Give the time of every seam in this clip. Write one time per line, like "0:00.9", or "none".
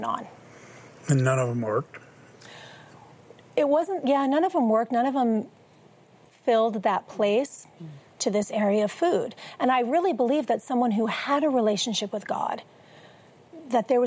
0:07.8